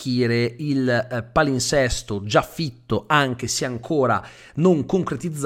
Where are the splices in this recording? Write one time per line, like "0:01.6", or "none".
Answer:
none